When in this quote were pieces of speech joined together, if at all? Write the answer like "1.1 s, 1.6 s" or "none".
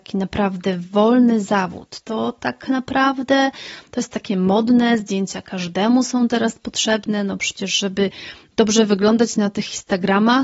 2.0 s